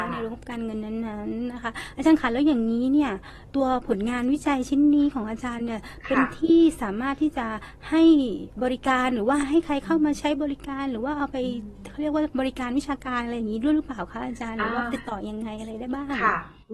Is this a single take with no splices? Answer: no; 1 cut; at 3.5 s

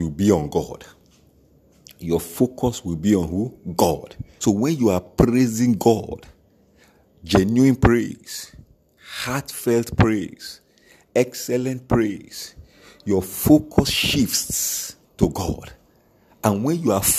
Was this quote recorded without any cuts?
no; 2 cuts; at 4.4 s, 15.0 s

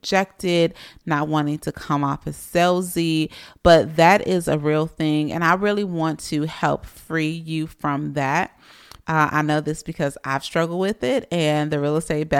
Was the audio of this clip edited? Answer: yes; 1 cut; at 9.0 s

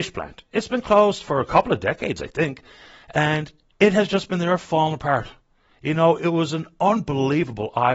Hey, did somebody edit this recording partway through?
no; 0 cuts

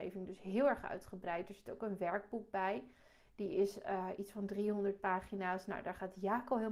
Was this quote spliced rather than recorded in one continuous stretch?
no; 0 cuts

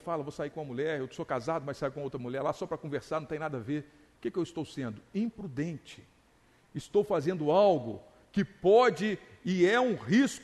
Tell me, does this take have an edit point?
no; 0 cuts

